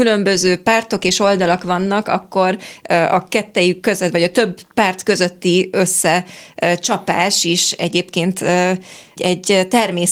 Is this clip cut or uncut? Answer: cut